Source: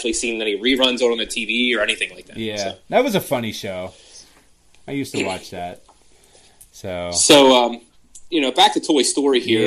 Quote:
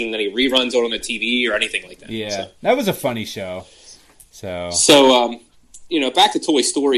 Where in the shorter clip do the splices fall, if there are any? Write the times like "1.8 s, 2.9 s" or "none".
4.1 s